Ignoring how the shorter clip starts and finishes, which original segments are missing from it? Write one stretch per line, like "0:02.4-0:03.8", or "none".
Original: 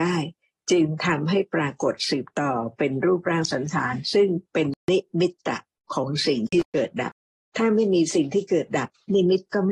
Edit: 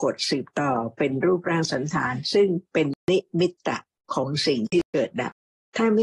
none